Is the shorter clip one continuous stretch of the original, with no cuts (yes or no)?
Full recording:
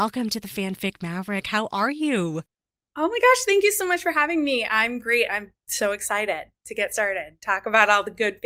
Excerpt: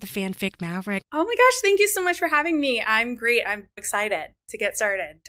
no